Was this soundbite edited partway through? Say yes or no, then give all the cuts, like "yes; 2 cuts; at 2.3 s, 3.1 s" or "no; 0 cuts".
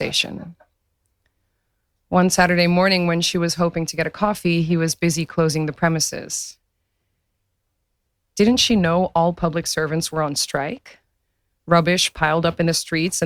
no; 0 cuts